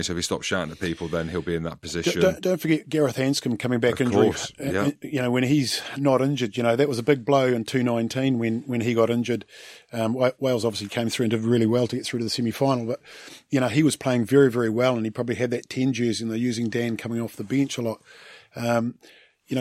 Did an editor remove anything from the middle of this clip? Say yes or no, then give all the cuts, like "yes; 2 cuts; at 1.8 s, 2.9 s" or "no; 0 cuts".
no; 0 cuts